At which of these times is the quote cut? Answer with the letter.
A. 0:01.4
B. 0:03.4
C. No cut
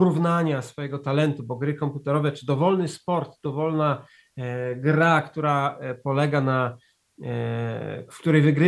C